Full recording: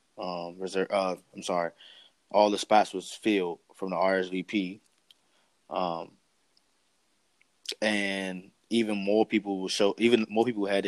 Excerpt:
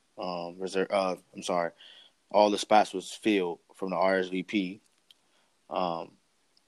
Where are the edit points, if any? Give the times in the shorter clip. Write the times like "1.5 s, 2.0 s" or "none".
none